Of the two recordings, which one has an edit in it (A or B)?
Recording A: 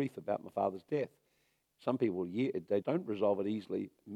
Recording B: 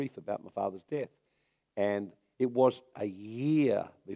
A